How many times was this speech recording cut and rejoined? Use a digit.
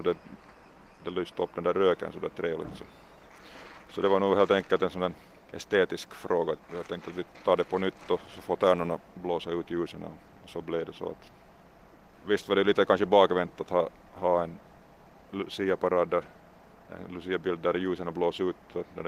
1